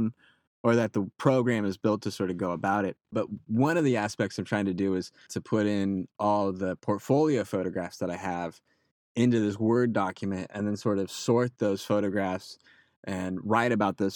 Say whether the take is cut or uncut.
cut